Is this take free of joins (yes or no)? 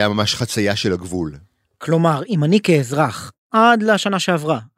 yes